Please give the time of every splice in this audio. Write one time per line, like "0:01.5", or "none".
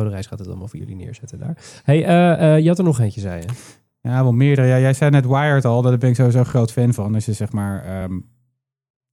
none